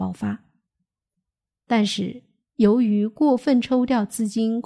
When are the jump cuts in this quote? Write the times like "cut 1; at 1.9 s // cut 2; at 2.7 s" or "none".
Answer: cut 1; at 1.5 s